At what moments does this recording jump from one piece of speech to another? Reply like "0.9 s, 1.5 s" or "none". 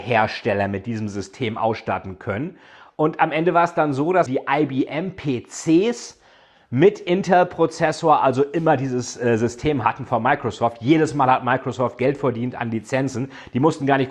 4.3 s

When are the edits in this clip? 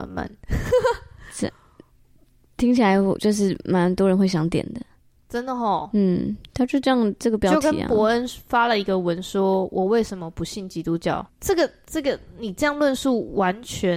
11.3 s

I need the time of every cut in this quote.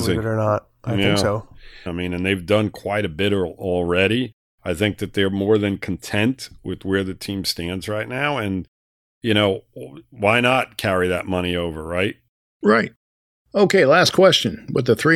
1.9 s

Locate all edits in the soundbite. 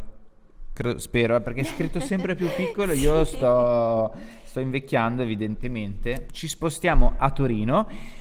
6.3 s

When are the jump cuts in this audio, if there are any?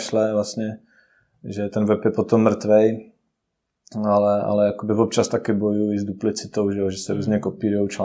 none

